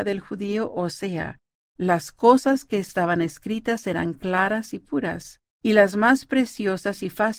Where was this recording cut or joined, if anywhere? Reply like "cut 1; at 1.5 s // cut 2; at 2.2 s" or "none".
cut 1; at 1.6 s // cut 2; at 5.5 s